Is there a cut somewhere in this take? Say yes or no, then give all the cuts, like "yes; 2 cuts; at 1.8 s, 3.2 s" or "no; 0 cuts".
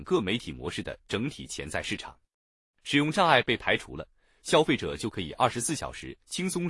no; 0 cuts